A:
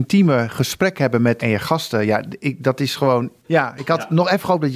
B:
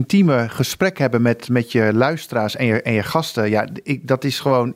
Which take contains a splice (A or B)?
A